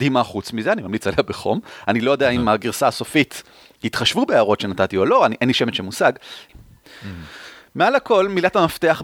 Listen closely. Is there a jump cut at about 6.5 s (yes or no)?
yes